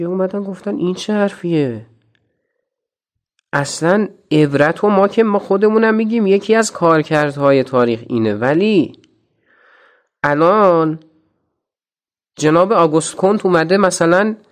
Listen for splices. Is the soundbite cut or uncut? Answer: uncut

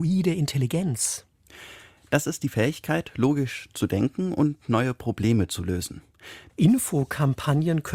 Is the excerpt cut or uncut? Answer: cut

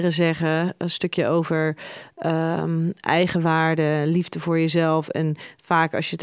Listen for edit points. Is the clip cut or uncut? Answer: uncut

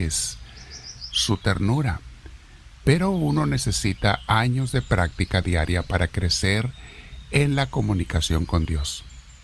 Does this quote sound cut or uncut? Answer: cut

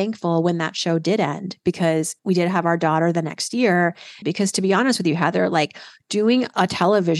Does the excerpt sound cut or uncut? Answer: cut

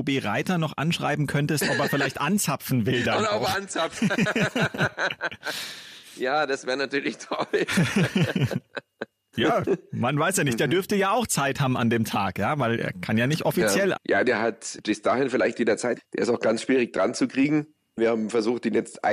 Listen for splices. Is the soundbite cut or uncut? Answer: cut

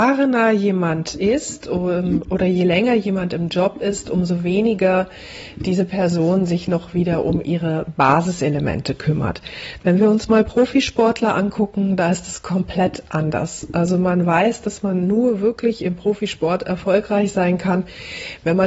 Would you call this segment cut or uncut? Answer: uncut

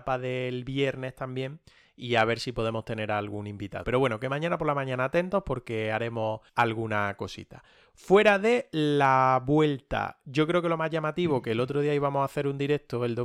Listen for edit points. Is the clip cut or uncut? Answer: cut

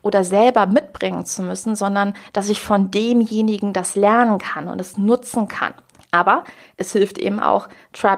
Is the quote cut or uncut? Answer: cut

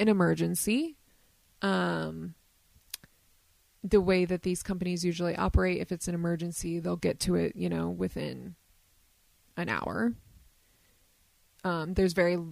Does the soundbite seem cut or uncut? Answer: uncut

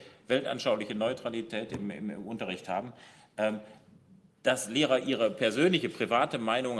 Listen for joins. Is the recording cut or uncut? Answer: uncut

